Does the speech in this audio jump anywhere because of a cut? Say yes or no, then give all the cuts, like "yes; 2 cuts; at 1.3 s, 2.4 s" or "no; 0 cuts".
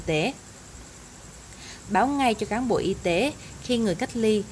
yes; 1 cut; at 1.8 s